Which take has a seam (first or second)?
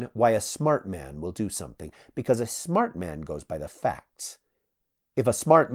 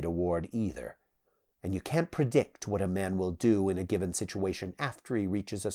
second